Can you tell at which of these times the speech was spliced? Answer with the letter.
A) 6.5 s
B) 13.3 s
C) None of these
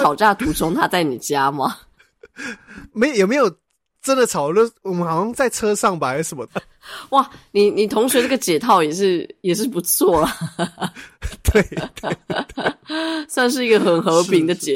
A